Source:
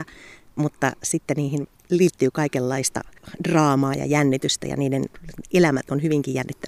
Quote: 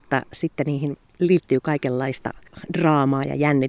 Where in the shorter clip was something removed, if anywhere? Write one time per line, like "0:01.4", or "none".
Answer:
none